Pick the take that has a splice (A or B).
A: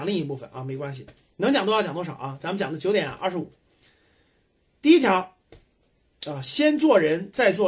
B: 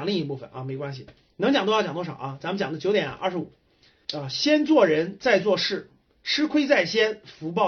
B